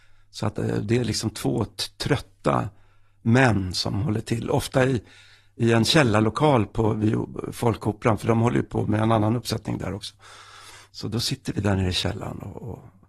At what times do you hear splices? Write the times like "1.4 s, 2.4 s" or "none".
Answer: none